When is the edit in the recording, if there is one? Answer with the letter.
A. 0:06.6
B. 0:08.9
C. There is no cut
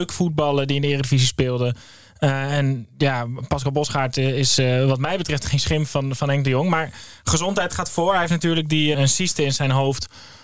B